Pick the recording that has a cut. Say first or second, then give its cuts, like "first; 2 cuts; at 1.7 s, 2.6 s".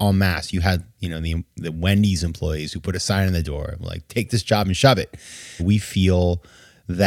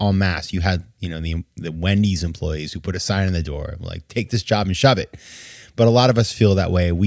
first; 1 cut; at 5.6 s